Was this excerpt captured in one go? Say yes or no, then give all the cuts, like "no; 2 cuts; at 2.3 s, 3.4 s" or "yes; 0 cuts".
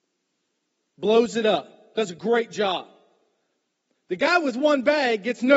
yes; 0 cuts